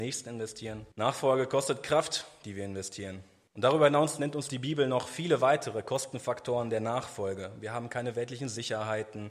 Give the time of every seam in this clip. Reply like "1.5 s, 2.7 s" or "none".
0.9 s, 3.5 s